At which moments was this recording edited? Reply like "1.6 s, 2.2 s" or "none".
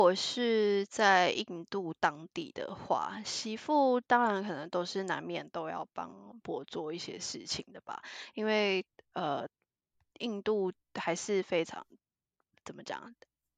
6.4 s